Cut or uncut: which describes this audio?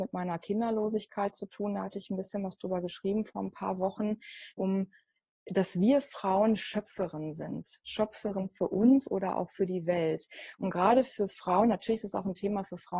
cut